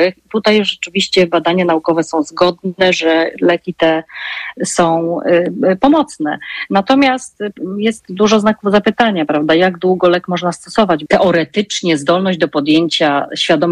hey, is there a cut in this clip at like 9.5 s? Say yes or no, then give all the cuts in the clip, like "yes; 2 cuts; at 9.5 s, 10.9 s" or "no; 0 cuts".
no; 1 cut; at 11.1 s